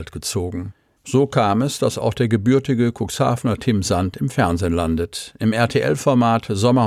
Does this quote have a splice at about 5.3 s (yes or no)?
no